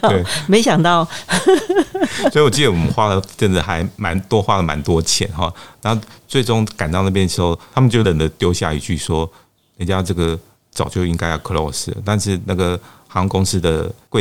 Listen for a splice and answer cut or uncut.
cut